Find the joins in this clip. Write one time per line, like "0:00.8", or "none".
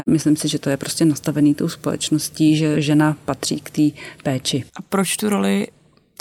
0:04.7

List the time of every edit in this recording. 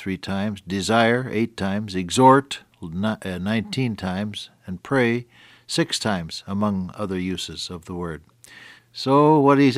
0:08.8

